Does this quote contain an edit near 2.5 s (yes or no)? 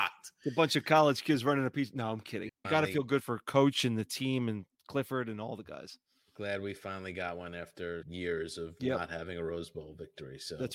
yes